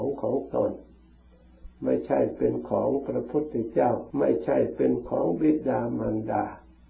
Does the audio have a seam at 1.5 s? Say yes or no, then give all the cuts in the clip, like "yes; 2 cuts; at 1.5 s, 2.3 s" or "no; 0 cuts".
no; 1 cut; at 4.1 s